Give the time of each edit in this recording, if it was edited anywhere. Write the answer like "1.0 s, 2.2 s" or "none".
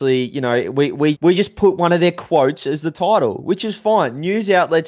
1.1 s

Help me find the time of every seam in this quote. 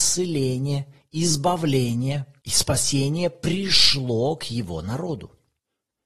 none

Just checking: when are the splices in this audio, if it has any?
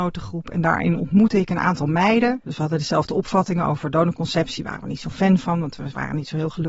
2.5 s

